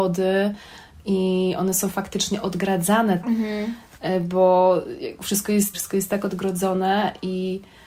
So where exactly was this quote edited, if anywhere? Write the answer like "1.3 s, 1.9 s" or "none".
3.2 s, 5.7 s